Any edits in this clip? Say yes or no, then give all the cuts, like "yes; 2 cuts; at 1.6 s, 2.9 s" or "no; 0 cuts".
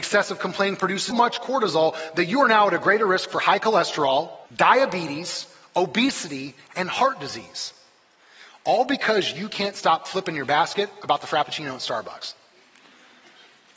yes; 2 cuts; at 1.1 s, 4.5 s